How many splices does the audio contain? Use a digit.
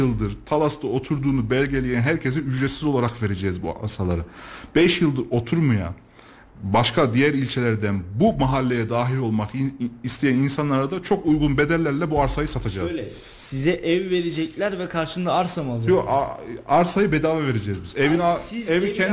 0